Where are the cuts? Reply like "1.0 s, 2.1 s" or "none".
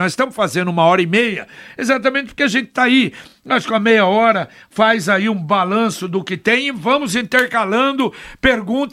none